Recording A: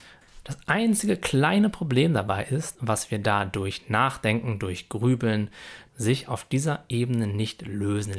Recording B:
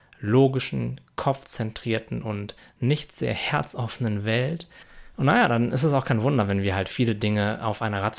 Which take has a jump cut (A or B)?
A